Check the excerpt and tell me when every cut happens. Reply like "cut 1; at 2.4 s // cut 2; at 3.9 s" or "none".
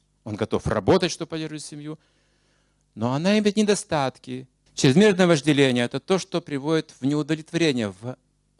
cut 1; at 4.7 s